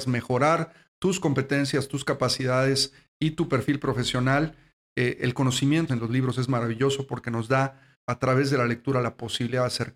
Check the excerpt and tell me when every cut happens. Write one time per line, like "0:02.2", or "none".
0:05.9
0:08.0